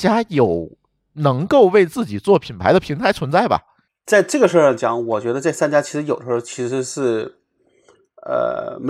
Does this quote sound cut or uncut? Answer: uncut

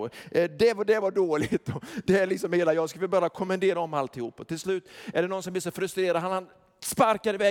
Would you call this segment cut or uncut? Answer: uncut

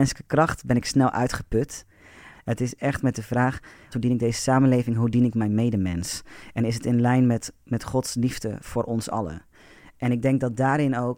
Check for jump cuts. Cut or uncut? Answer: cut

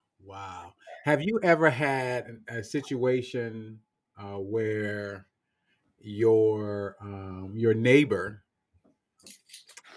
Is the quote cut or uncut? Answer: uncut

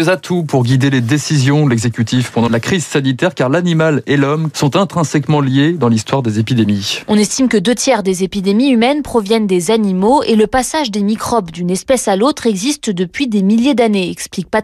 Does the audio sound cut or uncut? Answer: cut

